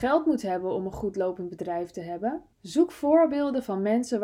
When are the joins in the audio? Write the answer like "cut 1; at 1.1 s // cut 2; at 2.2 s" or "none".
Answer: cut 1; at 2.5 s